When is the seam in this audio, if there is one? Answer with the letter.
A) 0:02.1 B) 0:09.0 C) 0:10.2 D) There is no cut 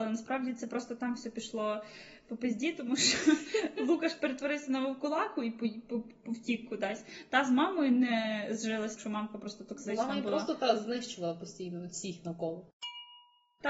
B